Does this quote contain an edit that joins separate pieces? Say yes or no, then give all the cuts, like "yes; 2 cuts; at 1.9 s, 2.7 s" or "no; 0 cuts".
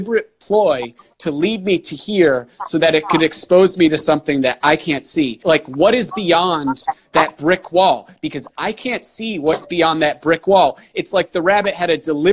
yes; 1 cut; at 5.4 s